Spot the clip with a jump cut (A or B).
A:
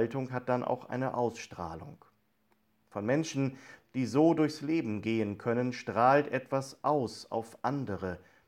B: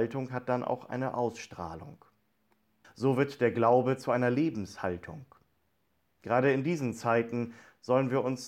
B